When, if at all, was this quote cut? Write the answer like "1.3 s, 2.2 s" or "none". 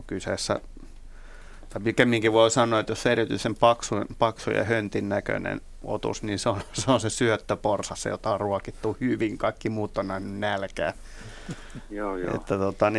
none